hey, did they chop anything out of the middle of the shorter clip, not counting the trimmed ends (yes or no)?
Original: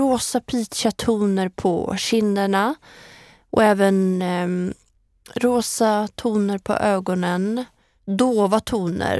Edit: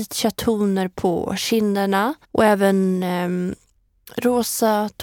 yes